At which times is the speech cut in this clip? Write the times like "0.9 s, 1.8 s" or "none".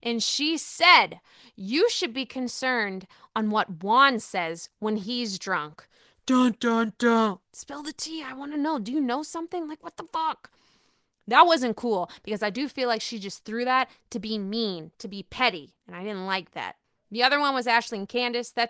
7.4 s